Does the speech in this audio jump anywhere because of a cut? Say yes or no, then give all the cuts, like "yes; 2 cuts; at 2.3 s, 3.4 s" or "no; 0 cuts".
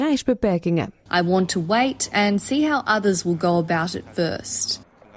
yes; 1 cut; at 1.1 s